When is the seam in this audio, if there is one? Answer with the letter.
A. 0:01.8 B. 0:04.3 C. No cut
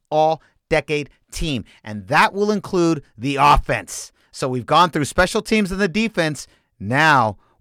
C